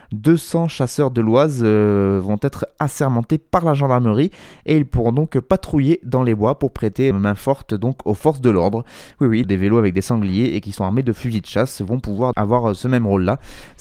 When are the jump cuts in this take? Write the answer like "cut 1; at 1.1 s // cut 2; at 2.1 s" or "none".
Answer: cut 1; at 7.1 s // cut 2; at 9.4 s // cut 3; at 12.3 s